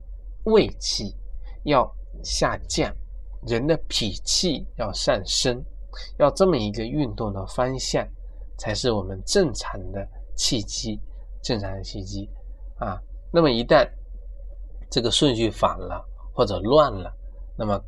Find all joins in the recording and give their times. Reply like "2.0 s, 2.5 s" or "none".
none